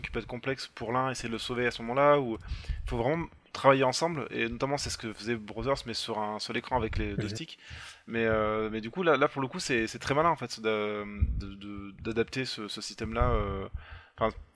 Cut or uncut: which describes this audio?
uncut